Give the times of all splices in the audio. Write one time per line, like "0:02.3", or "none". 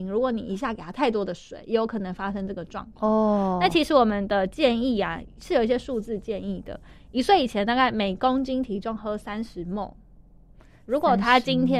none